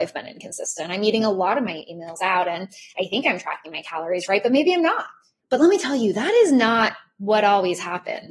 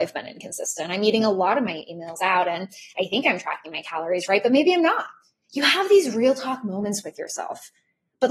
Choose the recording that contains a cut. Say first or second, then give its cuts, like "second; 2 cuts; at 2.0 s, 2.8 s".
first; 1 cut; at 5.4 s